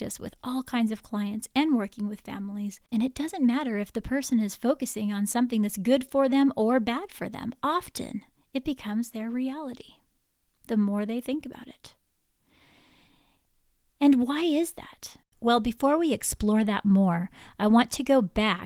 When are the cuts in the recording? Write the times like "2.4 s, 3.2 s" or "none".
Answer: none